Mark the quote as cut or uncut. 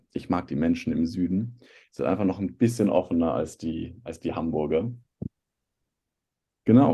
uncut